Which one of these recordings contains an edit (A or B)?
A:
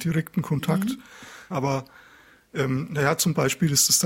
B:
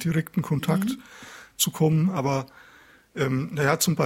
A